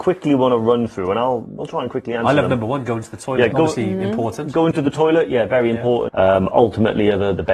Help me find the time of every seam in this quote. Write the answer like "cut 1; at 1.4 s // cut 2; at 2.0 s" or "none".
cut 1; at 3.5 s // cut 2; at 6.1 s